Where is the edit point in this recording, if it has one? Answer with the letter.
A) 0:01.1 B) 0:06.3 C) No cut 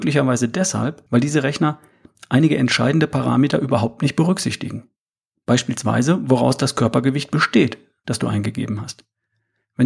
A